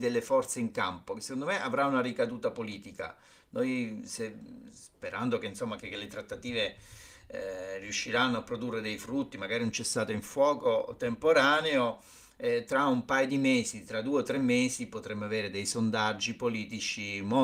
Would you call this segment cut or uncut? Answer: cut